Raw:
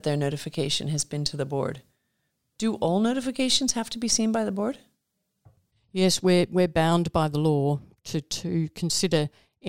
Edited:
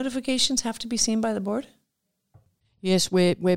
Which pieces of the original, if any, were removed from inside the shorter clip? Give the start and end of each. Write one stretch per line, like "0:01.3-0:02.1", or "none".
none